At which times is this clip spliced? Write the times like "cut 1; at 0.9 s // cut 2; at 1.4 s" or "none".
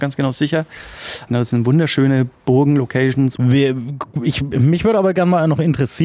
cut 1; at 1.3 s // cut 2; at 3.4 s